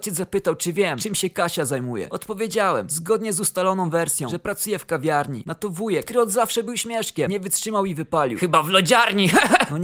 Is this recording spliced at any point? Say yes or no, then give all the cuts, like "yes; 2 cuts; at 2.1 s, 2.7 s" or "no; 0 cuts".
no; 0 cuts